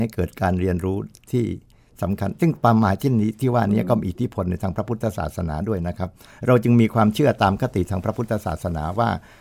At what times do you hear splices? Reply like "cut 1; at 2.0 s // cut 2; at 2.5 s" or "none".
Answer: none